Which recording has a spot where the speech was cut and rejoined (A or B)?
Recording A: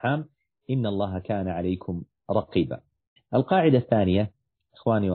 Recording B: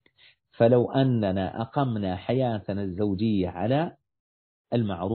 A